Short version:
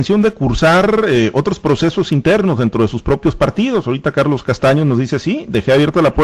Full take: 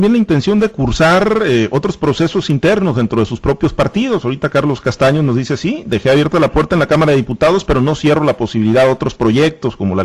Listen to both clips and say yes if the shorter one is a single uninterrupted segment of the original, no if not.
yes